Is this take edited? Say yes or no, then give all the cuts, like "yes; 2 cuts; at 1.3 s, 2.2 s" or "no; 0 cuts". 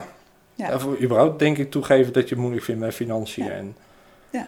no; 0 cuts